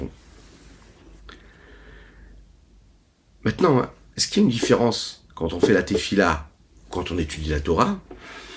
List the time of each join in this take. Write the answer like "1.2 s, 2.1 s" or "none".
none